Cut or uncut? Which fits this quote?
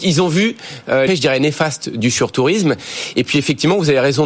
cut